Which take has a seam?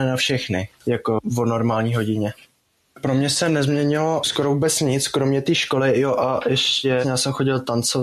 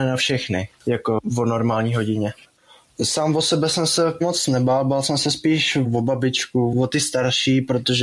second; 2 cuts; at 2.5 s, 6.7 s

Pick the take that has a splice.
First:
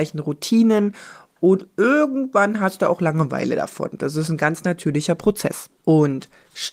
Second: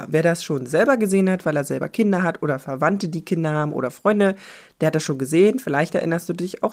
first; 1 cut; at 5.8 s

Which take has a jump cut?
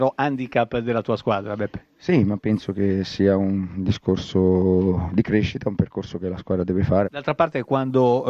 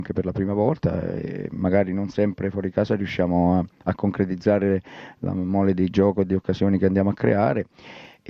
first; 1 cut; at 7.0 s

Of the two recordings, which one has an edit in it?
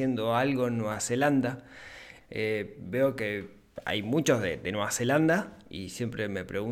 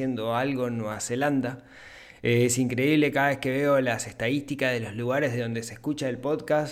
first; 1 cut; at 2.2 s

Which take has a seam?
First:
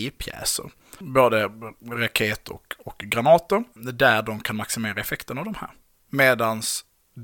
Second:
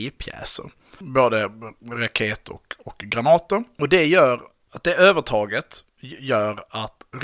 first; 1 cut; at 3.7 s

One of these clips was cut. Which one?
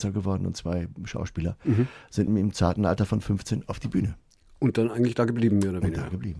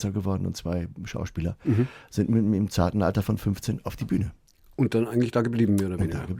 first; 1 cut; at 2.3 s

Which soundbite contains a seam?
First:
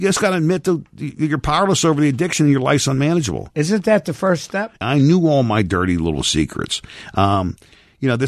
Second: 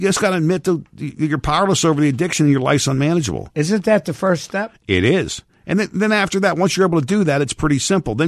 first; 1 cut; at 4.8 s

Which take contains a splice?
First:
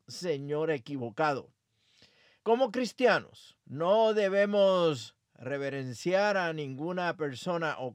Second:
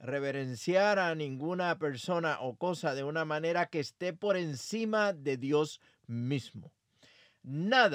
first; 2 cuts; at 2.4 s, 3.6 s

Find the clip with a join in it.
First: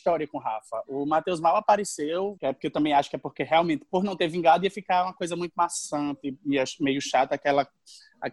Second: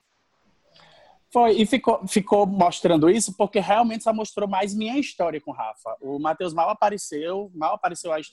first; 1 cut; at 2.4 s

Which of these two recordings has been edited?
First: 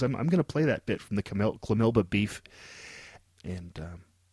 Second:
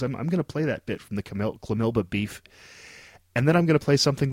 first; 1 cut; at 3.2 s

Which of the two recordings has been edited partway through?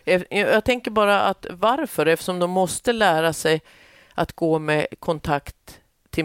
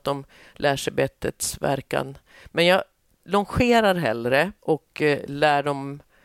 second; 1 cut; at 4.6 s

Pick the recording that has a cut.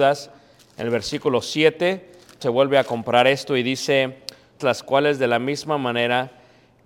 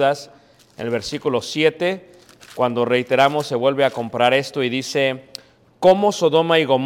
first; 2 cuts; at 2.4 s, 4.6 s

